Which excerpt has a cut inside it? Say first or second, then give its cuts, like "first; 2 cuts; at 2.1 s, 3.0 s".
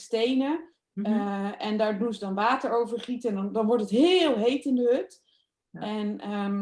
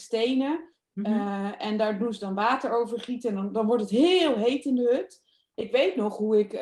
second; 1 cut; at 5.5 s